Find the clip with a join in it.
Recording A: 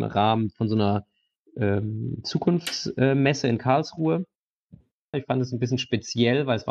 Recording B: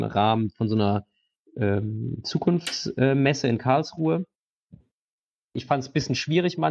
A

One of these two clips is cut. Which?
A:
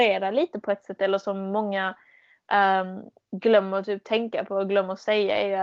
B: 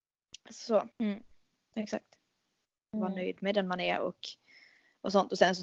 B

